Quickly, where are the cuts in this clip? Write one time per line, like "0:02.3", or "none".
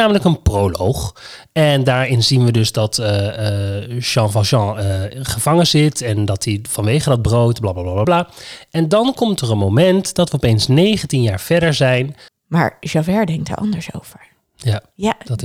0:08.0
0:12.3